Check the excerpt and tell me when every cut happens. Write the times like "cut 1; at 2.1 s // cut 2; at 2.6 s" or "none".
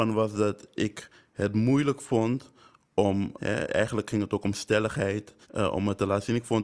cut 1; at 3.4 s // cut 2; at 5.4 s

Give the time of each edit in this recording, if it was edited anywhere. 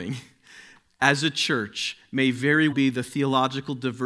cut 1; at 2.7 s

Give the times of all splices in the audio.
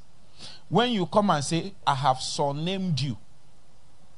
cut 1; at 1.8 s

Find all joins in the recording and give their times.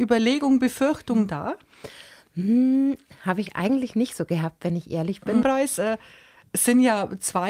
cut 1; at 5.4 s

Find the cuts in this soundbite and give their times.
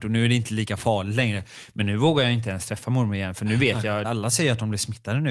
cut 1; at 4.0 s

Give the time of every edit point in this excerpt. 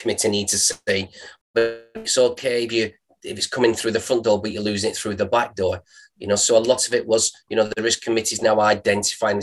cut 1; at 1.4 s

